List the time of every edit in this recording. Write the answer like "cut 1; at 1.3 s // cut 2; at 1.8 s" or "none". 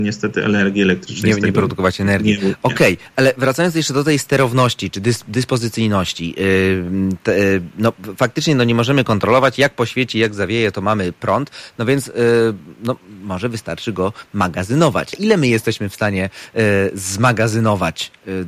cut 1; at 15.1 s

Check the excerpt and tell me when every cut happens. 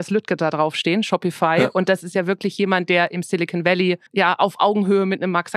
cut 1; at 4.1 s

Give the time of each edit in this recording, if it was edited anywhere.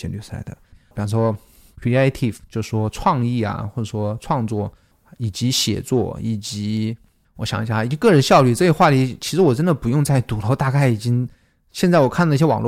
cut 1; at 0.9 s

